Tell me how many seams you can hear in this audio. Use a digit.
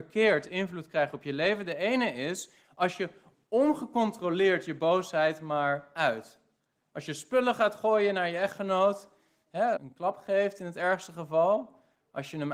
1